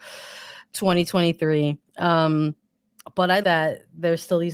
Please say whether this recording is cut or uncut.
cut